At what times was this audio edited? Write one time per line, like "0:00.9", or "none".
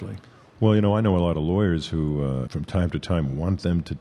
0:02.5